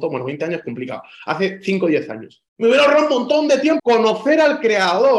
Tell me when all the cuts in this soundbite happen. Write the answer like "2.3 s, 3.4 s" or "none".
2.5 s, 3.8 s